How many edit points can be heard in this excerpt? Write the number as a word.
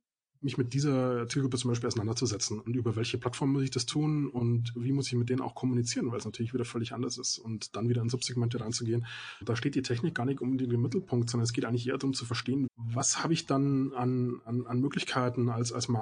two